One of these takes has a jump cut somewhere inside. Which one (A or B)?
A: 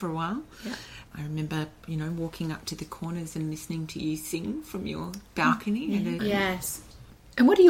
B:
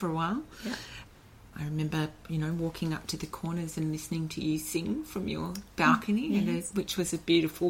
A